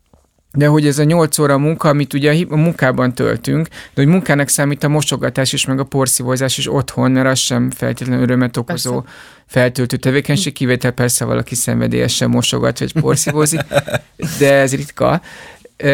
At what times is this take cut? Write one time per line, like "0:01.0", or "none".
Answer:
none